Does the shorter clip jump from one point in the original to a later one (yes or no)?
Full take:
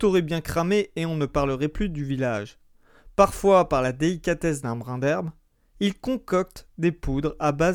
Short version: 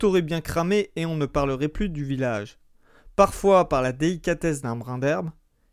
no